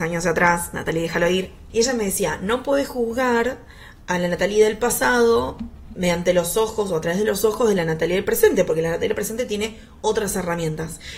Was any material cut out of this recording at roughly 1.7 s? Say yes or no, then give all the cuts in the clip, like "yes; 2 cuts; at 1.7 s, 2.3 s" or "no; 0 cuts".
yes; 1 cut; at 1.7 s